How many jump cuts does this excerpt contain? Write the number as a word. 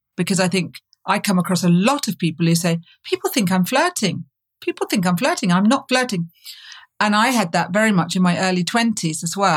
zero